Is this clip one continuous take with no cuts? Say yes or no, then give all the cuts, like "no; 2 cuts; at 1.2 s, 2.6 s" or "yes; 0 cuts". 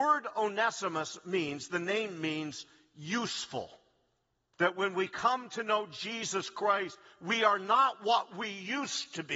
no; 1 cut; at 4.5 s